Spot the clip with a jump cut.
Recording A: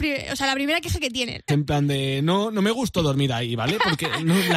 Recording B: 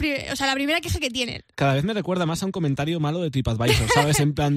A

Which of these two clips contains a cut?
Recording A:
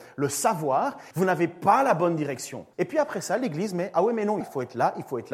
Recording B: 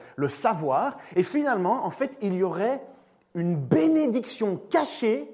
A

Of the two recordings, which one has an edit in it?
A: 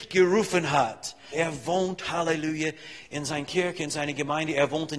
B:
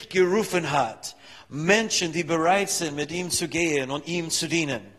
A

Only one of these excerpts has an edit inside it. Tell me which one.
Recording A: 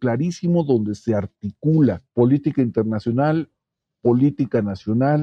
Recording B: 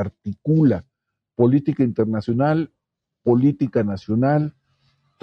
A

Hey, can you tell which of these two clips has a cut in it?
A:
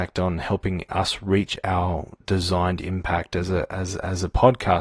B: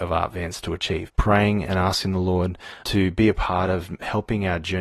B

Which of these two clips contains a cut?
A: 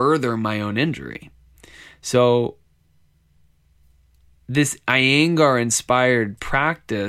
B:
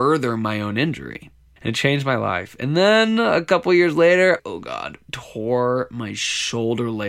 B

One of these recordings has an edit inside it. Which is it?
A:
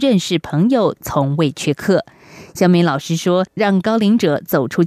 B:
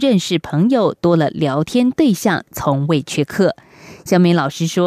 A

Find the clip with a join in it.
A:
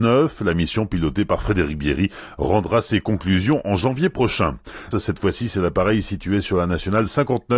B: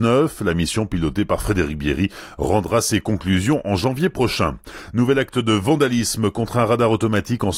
A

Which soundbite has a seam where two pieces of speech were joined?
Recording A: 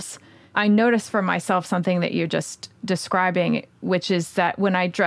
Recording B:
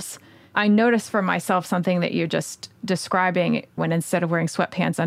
B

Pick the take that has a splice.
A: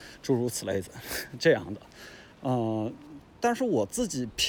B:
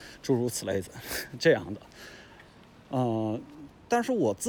A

